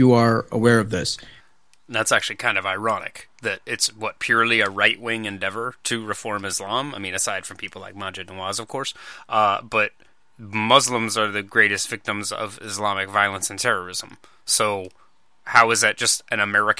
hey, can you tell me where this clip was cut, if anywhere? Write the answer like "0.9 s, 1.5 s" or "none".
none